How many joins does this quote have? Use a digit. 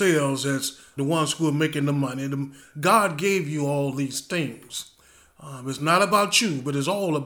2